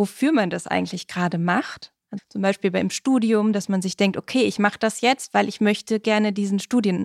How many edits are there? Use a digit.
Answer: 1